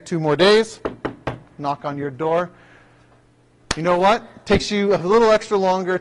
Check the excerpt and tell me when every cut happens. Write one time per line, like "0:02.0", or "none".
none